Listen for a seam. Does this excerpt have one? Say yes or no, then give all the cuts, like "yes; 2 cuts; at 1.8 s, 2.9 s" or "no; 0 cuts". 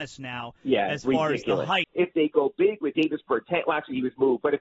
yes; 2 cuts; at 1.8 s, 2.9 s